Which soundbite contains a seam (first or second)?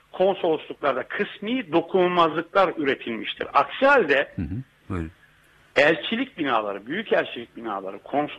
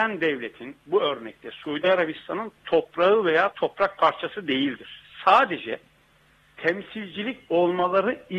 first